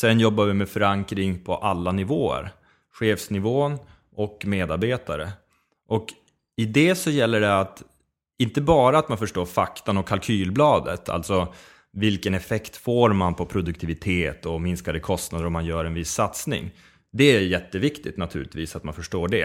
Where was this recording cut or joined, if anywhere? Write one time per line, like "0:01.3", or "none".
none